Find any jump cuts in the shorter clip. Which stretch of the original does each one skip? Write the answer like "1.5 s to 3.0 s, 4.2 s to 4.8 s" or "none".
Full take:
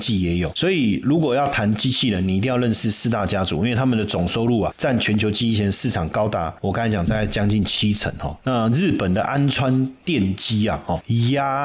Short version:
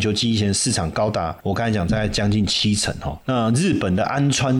none